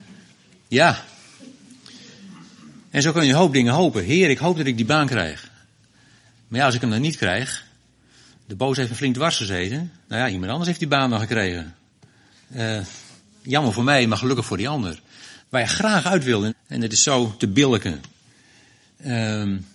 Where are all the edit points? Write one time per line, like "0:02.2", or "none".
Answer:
0:15.4
0:16.5